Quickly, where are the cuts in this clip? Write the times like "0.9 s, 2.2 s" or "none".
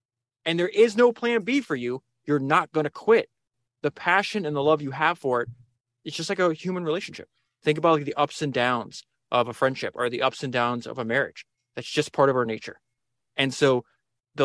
11.5 s